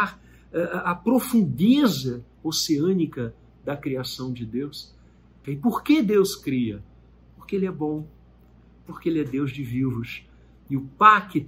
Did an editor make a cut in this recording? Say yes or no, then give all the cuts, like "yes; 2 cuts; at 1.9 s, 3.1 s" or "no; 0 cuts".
yes; 1 cut; at 5.4 s